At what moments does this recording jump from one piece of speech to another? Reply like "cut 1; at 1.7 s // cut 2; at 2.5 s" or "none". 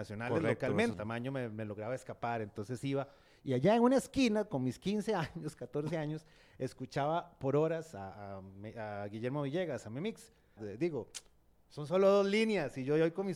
cut 1; at 0.9 s // cut 2; at 10.6 s